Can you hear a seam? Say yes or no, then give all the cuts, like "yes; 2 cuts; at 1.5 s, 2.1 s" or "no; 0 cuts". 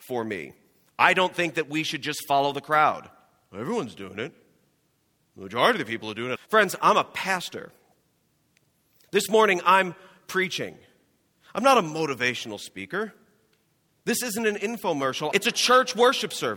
yes; 2 cuts; at 6.4 s, 15.3 s